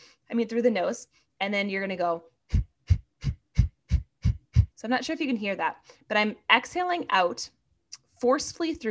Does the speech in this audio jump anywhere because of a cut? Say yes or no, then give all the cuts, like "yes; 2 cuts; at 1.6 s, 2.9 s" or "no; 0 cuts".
yes; 2 cuts; at 1.3 s, 4.7 s